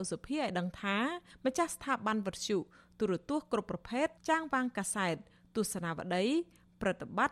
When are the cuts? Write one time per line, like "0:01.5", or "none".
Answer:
0:04.2